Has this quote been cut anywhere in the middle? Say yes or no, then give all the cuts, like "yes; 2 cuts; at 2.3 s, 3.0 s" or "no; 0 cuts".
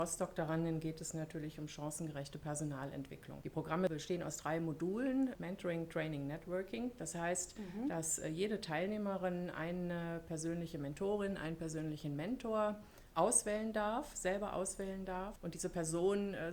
no; 0 cuts